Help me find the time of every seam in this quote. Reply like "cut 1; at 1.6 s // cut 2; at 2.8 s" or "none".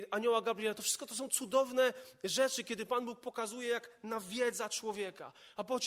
none